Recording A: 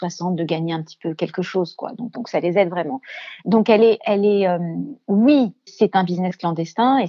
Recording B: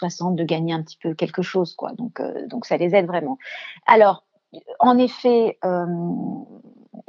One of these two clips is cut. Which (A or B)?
A